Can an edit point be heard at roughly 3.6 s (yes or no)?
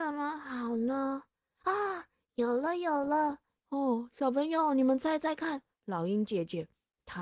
yes